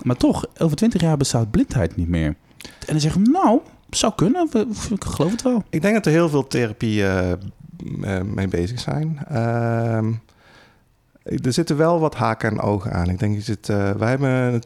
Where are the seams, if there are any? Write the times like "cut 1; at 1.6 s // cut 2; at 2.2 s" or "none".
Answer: none